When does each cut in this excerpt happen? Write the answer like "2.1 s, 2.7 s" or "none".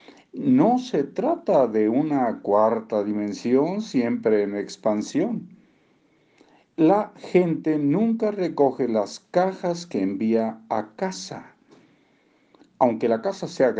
12.6 s